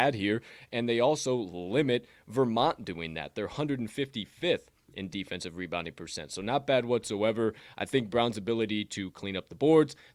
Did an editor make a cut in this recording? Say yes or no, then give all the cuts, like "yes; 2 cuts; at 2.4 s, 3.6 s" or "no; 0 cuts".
no; 0 cuts